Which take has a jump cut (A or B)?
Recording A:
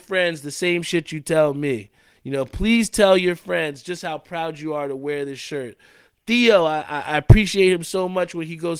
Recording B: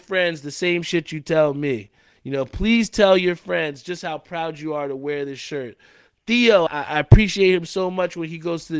B